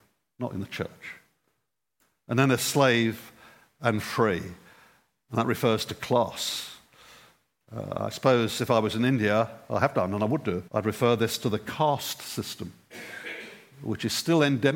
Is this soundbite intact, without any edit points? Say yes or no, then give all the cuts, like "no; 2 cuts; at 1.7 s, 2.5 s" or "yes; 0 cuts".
no; 1 cut; at 10.7 s